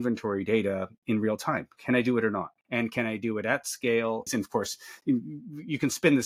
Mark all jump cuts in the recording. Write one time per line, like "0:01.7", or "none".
0:02.6
0:04.3